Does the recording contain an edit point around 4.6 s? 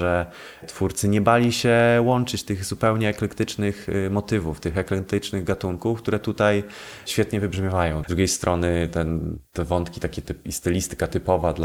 no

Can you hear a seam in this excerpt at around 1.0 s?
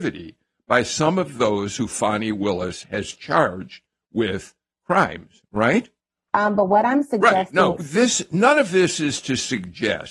no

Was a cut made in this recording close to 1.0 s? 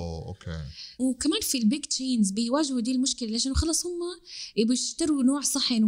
yes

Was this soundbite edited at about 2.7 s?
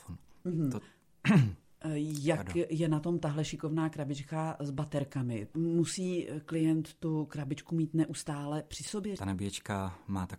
no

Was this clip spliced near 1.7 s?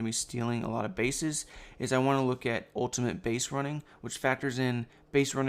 no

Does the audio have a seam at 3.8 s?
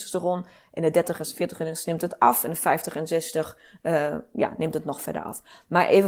no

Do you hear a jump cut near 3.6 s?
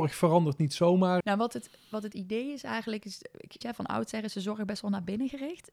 yes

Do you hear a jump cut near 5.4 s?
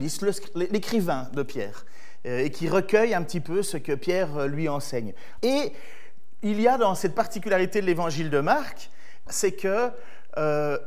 yes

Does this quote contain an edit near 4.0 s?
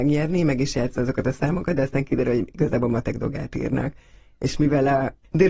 no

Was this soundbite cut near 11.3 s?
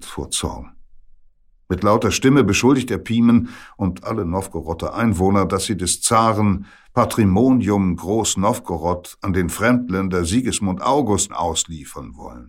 yes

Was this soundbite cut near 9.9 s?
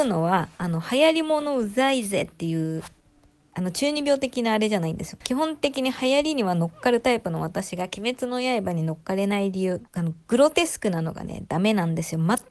yes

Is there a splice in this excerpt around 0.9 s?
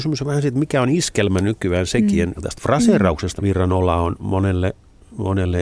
no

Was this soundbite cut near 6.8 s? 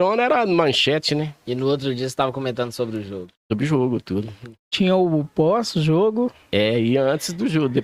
no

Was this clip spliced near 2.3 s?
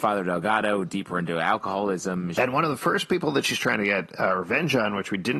yes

